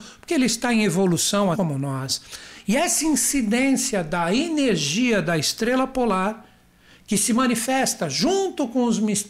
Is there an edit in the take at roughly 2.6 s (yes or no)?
yes